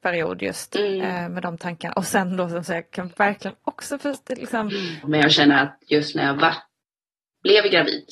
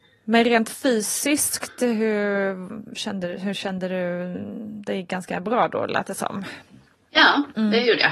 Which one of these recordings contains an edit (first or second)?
first